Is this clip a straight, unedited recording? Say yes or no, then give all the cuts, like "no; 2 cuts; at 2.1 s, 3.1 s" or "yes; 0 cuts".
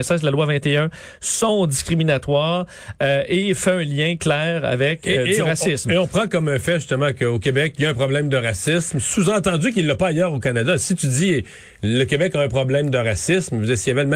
yes; 0 cuts